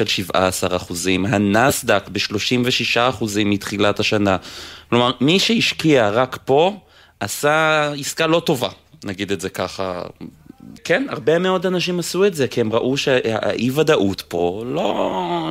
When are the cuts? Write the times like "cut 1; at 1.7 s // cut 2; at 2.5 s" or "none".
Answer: cut 1; at 10.8 s